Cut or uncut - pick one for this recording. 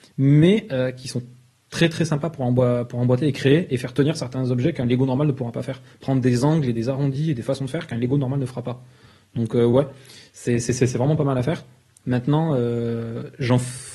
uncut